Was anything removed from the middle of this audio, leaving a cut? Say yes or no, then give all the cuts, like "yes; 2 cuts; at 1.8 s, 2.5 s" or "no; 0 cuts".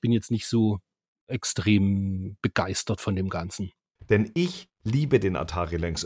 yes; 2 cuts; at 1.1 s, 4.0 s